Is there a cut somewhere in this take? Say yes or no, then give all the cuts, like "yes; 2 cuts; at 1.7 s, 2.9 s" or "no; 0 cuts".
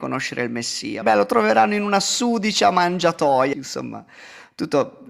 yes; 2 cuts; at 1.0 s, 3.5 s